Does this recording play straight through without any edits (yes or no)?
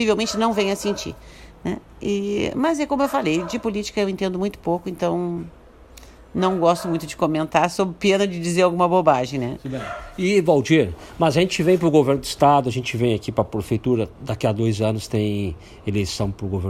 yes